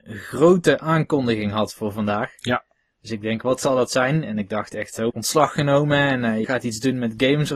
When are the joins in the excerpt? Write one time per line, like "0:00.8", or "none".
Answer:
0:05.1
0:06.4

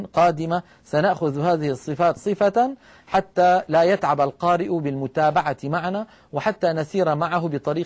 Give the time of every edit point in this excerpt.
0:02.2

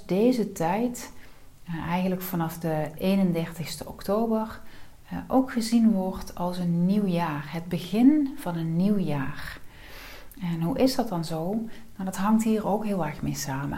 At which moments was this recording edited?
none

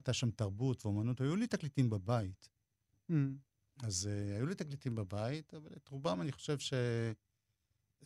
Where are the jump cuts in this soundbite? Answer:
0:02.9

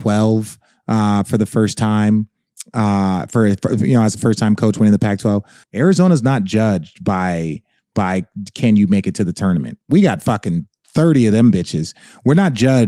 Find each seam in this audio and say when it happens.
0:05.6

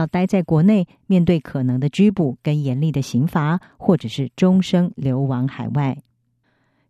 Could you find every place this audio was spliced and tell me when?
none

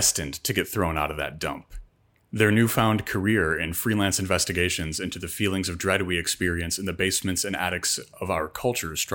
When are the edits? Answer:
0:02.2

